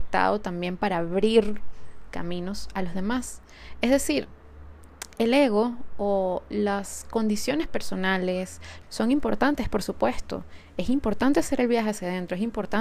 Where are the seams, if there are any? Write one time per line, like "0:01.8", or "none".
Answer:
0:08.8